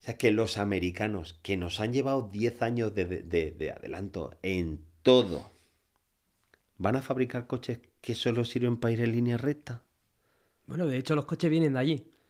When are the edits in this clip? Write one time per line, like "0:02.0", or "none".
none